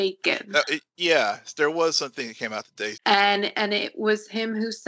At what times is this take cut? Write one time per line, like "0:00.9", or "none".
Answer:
0:02.9